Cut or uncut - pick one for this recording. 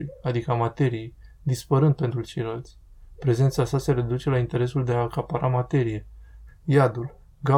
cut